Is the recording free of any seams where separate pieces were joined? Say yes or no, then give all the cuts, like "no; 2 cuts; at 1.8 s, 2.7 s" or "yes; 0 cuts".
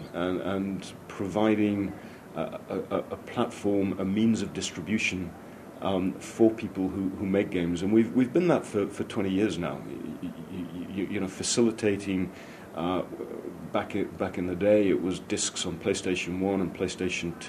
yes; 0 cuts